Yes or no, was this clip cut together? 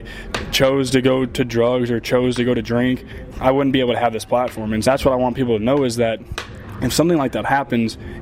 yes